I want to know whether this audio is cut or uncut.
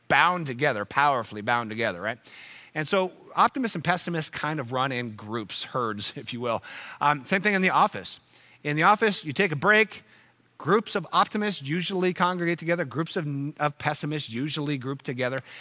uncut